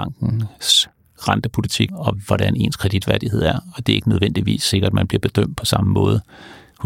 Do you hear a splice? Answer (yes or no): yes